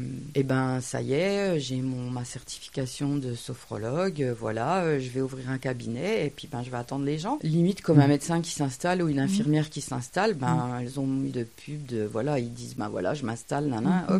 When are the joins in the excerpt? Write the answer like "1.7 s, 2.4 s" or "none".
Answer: 11.3 s